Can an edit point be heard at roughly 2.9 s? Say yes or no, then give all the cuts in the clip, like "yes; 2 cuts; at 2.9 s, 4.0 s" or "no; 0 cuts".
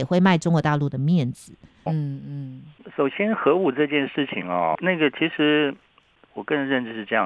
yes; 3 cuts; at 1.9 s, 2.9 s, 4.7 s